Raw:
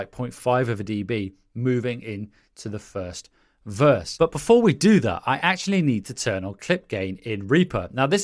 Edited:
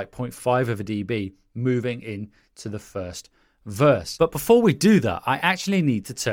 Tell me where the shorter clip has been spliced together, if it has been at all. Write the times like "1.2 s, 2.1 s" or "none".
none